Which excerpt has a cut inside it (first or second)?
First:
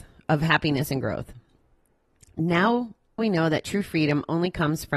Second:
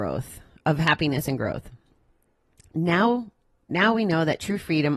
first